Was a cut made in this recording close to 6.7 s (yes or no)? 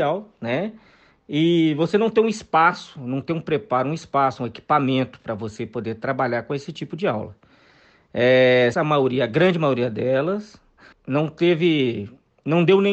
no